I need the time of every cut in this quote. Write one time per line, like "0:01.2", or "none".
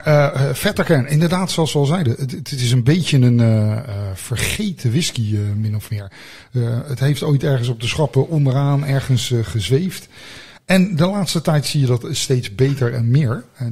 none

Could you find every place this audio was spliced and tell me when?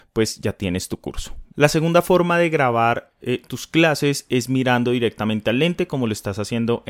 0:01.5

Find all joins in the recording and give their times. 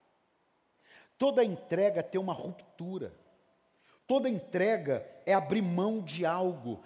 0:04.0

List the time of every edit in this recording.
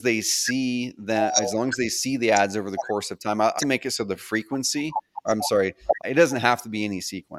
0:03.6
0:06.0

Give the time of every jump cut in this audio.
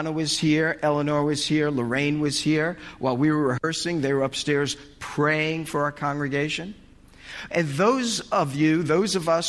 0:07.5

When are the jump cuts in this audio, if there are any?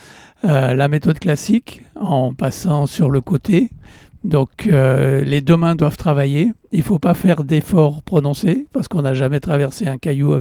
none

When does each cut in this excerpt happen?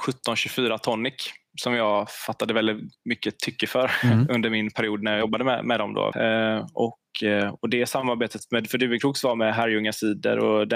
0:06.1

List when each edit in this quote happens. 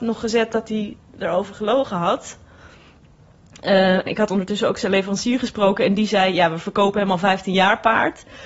0:04.1

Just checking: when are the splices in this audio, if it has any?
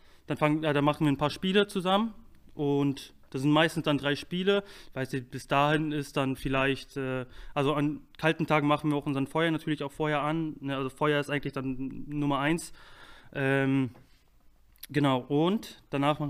none

